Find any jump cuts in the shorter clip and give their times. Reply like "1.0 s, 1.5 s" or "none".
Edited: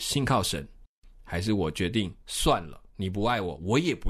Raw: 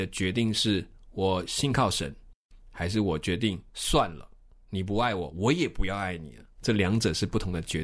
2.9 s